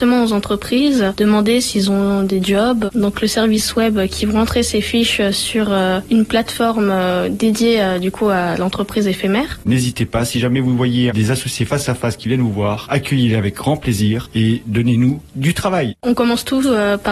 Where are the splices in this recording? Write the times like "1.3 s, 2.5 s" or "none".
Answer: 2.9 s, 9.6 s, 16.0 s